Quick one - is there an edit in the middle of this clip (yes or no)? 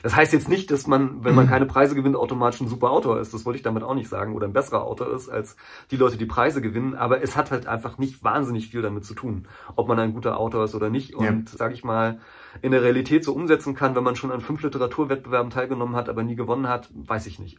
yes